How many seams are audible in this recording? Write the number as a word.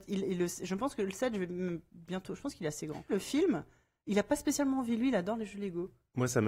one